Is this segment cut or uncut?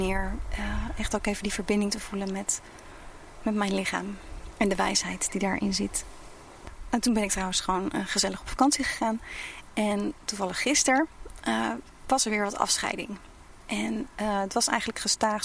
uncut